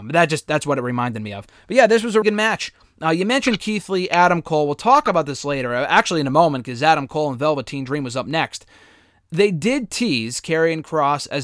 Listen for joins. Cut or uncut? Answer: cut